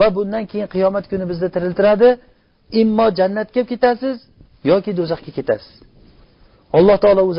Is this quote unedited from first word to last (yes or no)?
yes